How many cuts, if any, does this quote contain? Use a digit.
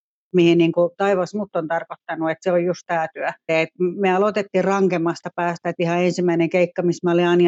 1